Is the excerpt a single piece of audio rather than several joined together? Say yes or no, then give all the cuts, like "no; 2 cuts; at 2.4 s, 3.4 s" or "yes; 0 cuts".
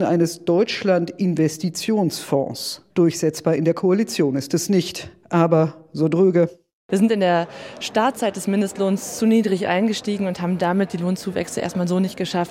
no; 1 cut; at 2.9 s